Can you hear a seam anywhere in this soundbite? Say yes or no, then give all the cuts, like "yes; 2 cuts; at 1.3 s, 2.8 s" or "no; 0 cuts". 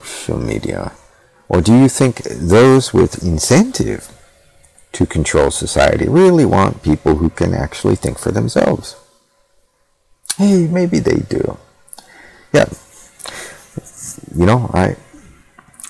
no; 0 cuts